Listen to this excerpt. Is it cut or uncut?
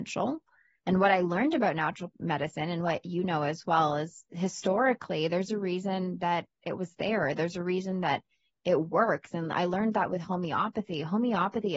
uncut